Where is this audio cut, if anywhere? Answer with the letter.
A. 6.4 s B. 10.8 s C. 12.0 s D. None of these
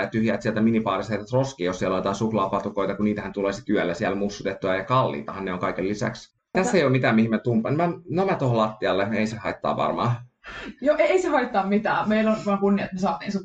A